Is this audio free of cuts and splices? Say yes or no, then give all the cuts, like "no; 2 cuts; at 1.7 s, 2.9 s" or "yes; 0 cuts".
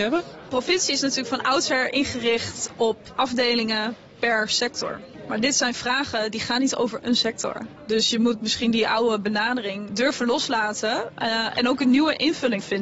no; 1 cut; at 9.9 s